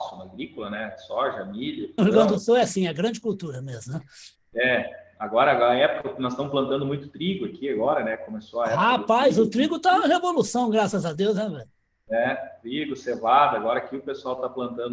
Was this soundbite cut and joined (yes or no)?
yes